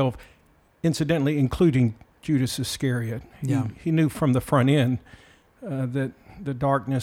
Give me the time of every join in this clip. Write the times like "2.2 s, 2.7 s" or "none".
none